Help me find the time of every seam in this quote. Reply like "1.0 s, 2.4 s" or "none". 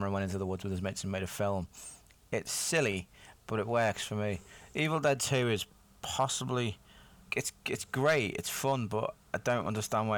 7.3 s